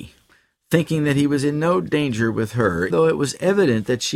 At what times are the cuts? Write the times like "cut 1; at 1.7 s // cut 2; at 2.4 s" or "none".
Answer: cut 1; at 2.9 s